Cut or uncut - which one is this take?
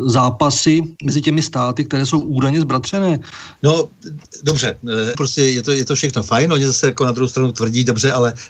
cut